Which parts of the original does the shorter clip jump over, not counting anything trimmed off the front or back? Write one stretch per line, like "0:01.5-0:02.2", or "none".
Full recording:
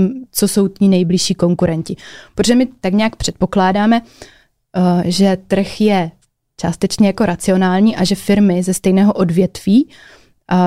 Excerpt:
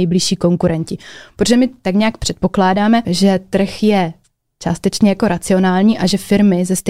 0:04.0-0:05.0